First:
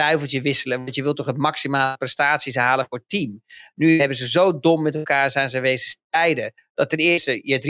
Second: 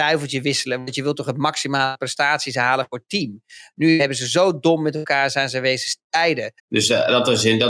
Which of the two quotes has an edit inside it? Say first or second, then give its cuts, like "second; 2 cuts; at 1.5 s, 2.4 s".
second; 1 cut; at 6.6 s